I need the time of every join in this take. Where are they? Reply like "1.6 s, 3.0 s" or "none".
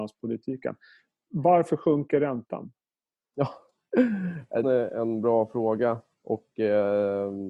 4.6 s